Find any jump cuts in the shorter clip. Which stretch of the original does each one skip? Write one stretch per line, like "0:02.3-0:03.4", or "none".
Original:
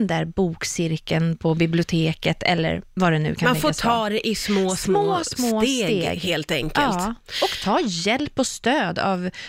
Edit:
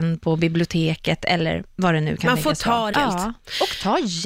0:04.1-0:06.7

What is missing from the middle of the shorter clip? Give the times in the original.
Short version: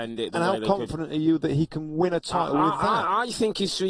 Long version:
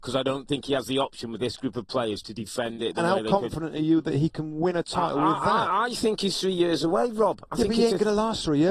none

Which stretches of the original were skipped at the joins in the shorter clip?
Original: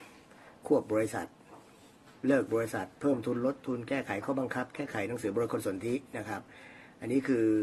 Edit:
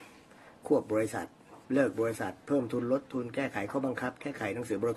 0:01.6-0:02.2

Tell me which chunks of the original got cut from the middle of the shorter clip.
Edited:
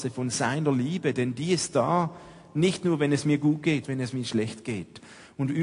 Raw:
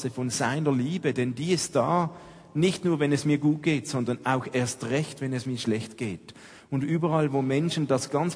0:03.8-0:05.2

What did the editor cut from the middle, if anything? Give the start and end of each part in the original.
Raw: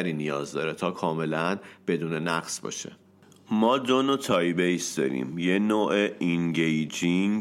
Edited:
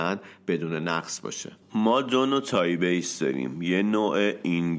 0:03.0-0:03.4

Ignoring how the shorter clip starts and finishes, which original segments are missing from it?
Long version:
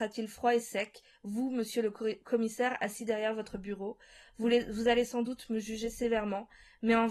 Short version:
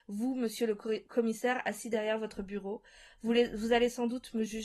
none

